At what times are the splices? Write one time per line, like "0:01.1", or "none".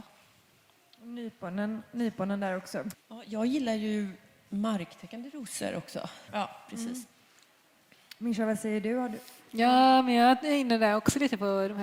0:02.9
0:06.3